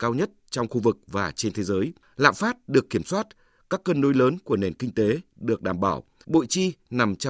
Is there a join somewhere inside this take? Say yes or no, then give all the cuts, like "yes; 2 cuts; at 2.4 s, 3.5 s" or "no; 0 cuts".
yes; 1 cut; at 6.2 s